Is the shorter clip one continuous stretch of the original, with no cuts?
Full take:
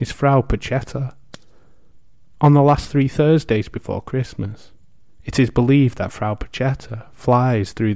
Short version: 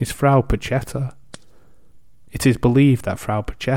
no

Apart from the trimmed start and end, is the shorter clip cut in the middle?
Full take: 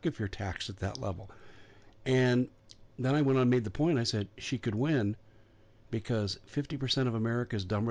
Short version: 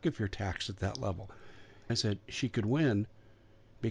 yes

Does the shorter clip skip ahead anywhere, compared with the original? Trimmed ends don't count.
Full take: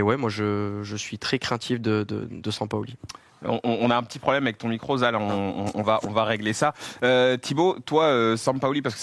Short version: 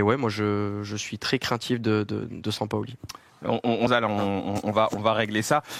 yes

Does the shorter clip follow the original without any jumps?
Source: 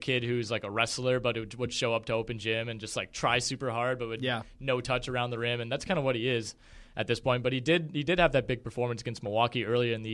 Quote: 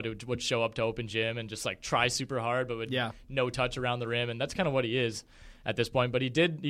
yes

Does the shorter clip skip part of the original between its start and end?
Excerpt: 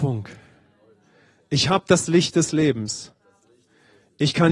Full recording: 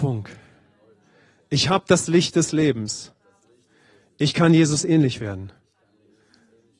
no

